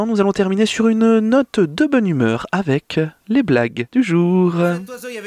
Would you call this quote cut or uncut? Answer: cut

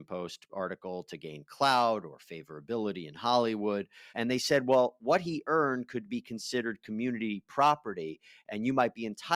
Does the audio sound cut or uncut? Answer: cut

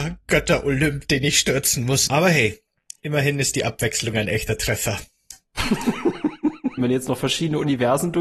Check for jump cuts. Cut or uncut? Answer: cut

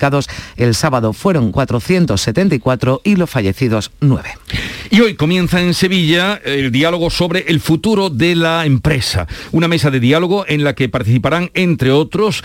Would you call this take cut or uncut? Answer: uncut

